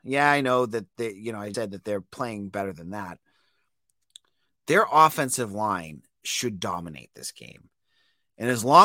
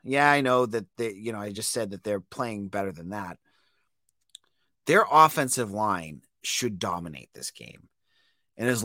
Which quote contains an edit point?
first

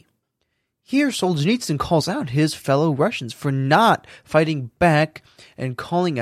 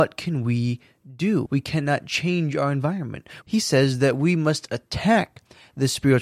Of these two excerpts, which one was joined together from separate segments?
second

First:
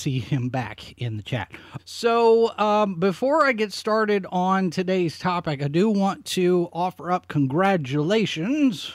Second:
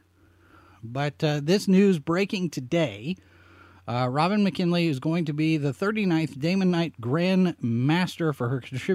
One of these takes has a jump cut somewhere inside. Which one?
first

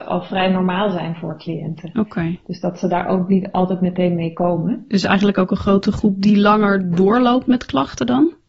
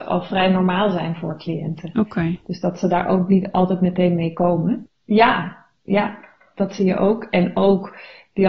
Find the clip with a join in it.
second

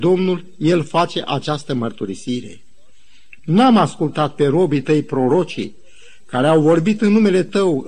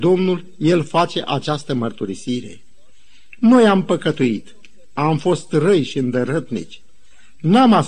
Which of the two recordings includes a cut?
first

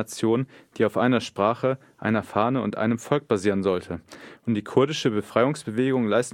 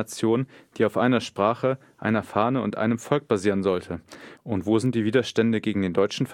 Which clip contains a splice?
second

